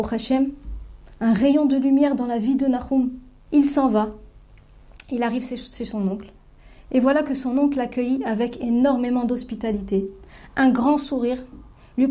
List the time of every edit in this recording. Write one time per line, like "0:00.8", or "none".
0:03.5

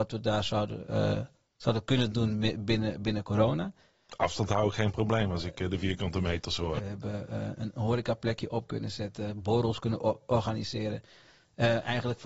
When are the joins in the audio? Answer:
0:06.8

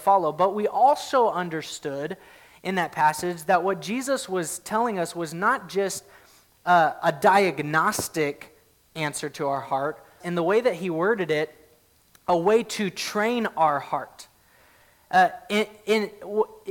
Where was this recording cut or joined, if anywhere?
0:10.2

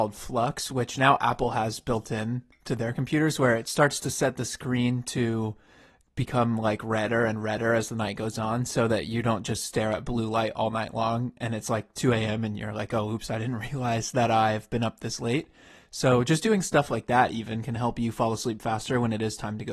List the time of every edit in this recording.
none

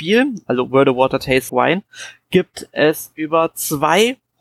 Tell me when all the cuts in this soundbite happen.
0:01.5

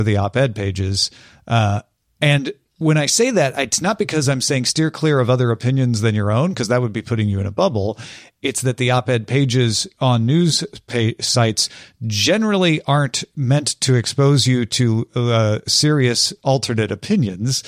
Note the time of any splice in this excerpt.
none

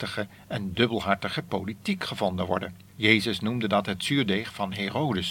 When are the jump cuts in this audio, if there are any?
0:02.9

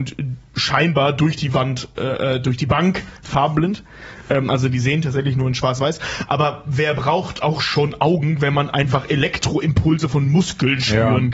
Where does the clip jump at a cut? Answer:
none

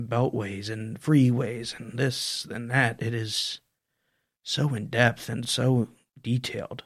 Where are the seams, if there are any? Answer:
none

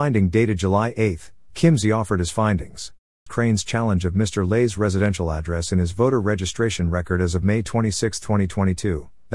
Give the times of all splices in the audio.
0:03.3

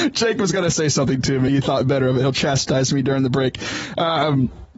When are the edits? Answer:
0:01.5

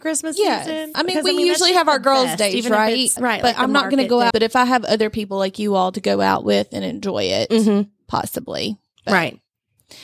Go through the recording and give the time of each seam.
0:00.9
0:03.2
0:04.3

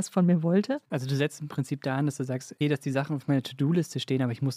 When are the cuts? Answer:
0:02.6

